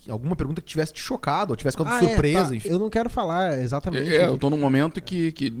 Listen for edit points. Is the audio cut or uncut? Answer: cut